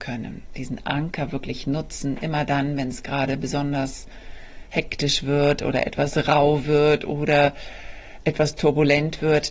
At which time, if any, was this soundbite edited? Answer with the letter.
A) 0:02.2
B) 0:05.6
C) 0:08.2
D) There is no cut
D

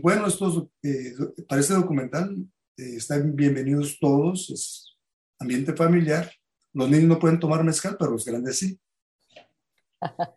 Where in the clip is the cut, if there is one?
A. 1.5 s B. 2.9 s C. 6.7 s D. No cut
D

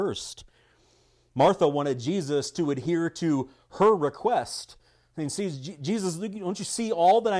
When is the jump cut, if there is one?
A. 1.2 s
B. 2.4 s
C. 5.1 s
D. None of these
D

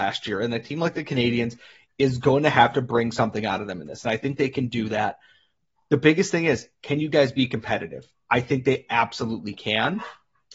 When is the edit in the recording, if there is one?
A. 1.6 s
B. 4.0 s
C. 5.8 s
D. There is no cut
D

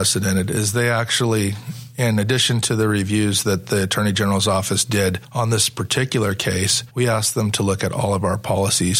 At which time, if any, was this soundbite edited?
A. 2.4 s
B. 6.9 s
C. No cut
C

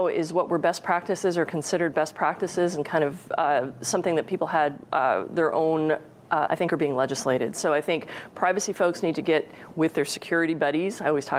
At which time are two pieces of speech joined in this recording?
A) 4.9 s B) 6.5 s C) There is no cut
B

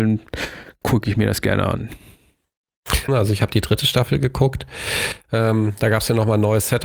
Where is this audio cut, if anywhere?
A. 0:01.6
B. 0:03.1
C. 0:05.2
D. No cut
B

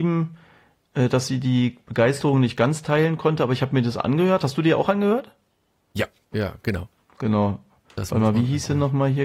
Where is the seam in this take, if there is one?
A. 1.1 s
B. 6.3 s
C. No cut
B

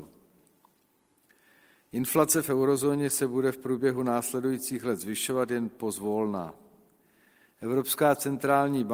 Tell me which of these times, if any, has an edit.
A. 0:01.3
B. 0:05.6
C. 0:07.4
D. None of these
D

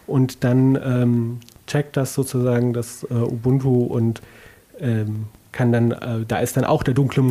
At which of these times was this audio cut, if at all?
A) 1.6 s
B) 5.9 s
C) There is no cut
C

